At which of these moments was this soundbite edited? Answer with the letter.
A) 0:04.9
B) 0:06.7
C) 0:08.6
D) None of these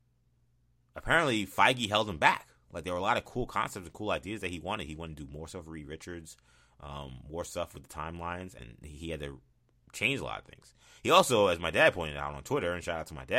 C